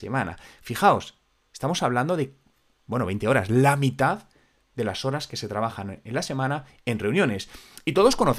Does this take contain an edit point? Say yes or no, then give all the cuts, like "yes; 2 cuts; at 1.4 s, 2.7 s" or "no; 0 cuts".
no; 0 cuts